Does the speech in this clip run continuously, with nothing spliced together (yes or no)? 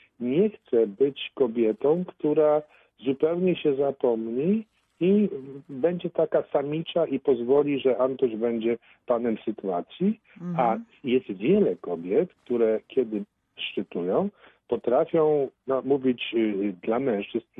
yes